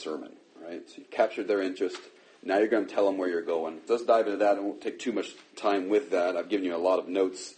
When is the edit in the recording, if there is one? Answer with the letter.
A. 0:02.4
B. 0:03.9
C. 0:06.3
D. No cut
B